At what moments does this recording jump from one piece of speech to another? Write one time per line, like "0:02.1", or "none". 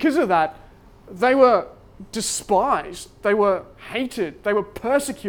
none